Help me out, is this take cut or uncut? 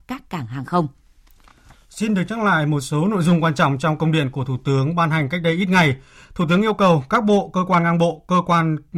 uncut